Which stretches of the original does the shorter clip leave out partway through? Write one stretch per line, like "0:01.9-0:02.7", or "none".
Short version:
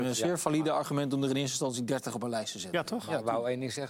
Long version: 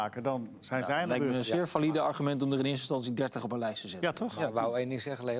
none